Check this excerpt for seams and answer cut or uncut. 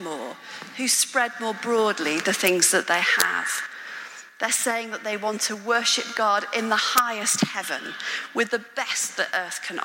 uncut